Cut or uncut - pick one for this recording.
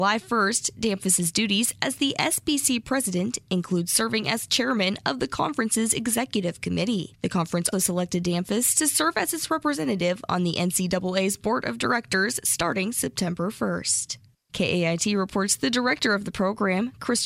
cut